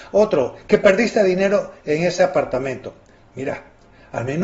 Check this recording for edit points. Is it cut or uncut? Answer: uncut